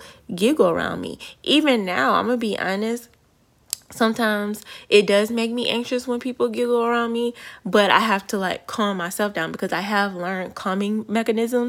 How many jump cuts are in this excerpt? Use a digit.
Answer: 0